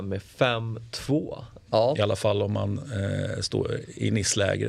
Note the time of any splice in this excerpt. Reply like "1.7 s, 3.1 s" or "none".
1.7 s